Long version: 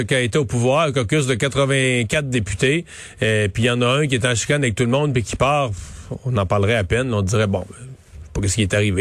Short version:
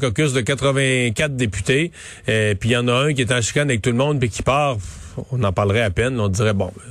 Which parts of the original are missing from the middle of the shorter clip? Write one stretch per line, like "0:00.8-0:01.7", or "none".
none